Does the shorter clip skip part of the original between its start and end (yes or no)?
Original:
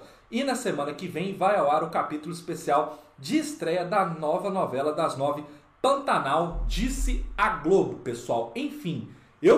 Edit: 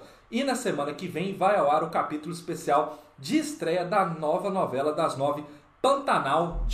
no